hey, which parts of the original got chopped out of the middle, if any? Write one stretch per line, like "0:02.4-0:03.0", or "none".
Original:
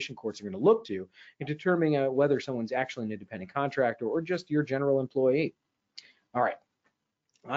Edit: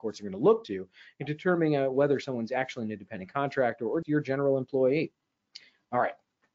0:04.2-0:04.4